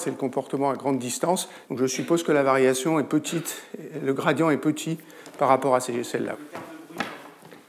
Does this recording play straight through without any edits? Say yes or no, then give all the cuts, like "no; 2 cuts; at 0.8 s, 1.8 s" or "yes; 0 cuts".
no; 2 cuts; at 1.6 s, 6.3 s